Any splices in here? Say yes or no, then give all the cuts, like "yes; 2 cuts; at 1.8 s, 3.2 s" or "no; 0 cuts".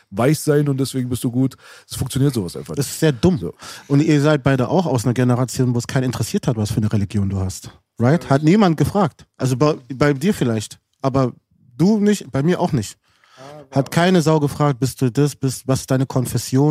no; 0 cuts